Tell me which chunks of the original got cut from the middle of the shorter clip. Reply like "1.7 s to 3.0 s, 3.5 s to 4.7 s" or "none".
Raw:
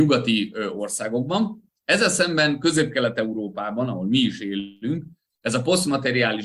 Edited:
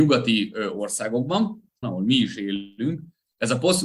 1.8 s to 3.9 s